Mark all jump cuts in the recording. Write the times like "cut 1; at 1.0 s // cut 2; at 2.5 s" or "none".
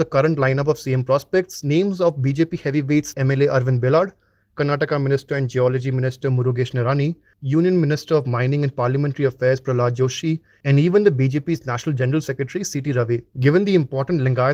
cut 1; at 3.1 s